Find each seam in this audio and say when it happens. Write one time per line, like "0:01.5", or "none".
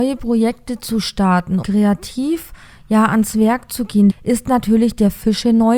0:01.6
0:04.1